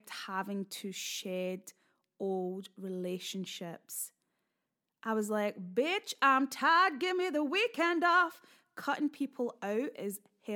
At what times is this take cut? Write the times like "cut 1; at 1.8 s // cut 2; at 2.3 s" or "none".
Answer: none